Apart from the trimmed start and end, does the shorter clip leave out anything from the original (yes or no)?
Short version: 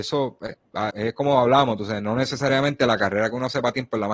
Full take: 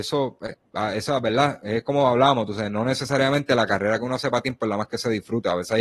yes